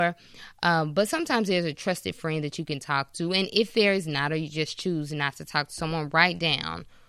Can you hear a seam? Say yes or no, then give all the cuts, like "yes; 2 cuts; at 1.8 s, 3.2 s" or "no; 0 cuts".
no; 0 cuts